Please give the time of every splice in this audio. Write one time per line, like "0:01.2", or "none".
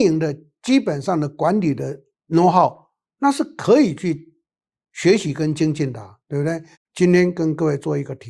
0:06.7